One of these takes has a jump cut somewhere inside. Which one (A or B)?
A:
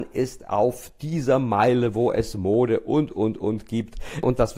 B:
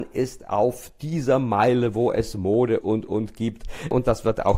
B